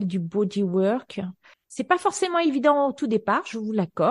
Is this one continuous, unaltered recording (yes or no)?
no